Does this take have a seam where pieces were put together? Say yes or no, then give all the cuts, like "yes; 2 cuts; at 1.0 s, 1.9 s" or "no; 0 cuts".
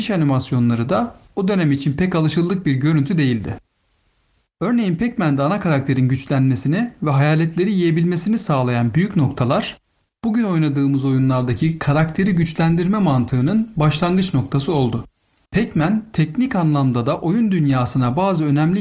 yes; 2 cuts; at 4.4 s, 15.5 s